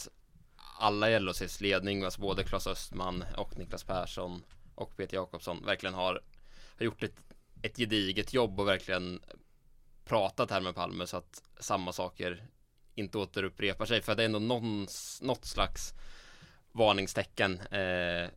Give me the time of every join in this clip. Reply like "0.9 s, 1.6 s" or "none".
none